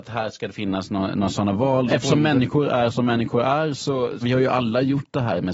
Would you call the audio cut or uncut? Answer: cut